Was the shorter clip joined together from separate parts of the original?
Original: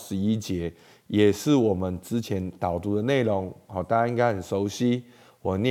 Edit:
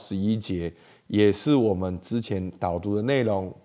no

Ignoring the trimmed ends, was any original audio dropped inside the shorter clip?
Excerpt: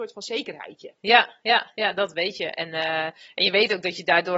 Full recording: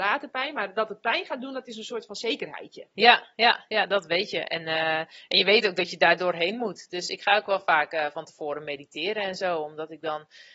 no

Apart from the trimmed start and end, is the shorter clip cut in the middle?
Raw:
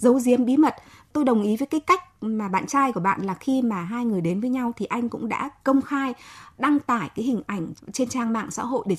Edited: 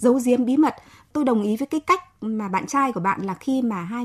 no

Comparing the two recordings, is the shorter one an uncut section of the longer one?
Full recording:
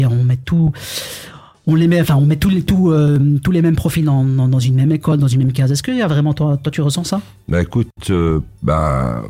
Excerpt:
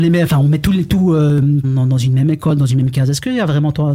no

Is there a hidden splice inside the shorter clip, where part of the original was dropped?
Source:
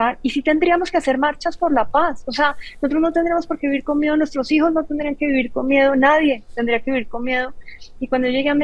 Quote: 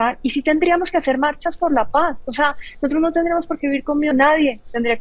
yes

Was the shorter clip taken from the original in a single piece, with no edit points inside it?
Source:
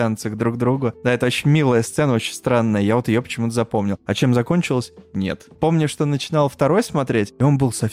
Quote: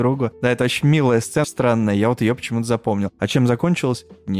no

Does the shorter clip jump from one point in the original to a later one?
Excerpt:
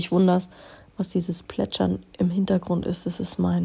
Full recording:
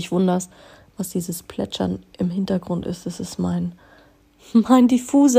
no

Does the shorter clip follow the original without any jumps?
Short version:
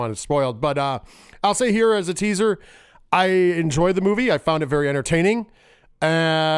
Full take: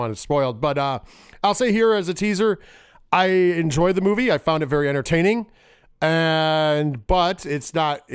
yes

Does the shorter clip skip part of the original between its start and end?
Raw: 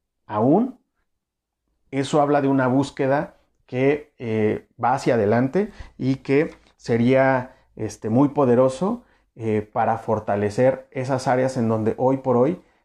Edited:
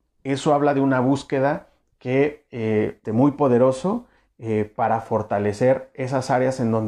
yes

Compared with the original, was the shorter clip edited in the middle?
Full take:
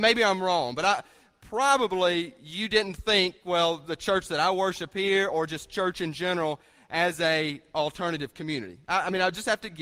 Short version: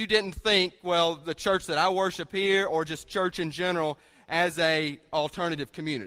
no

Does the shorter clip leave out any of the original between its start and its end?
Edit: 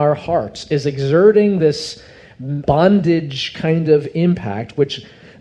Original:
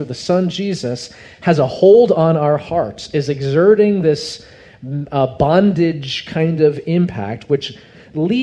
yes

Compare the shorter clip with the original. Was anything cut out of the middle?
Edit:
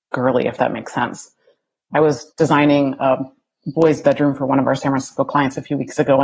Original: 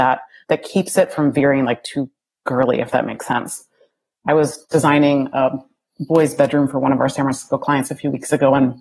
no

